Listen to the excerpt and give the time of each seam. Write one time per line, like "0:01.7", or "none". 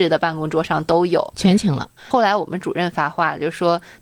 0:02.0